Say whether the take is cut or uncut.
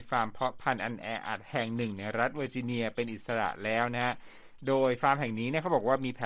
uncut